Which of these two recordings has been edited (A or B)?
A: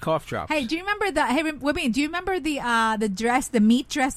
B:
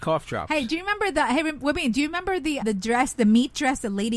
B